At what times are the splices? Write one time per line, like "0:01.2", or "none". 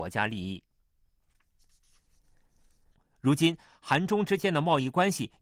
0:02.9

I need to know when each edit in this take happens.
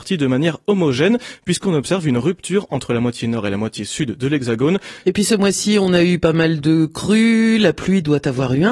0:05.0

